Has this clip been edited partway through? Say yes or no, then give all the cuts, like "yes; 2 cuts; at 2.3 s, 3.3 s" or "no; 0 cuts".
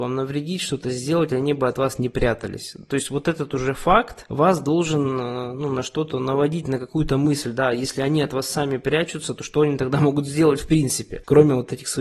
no; 0 cuts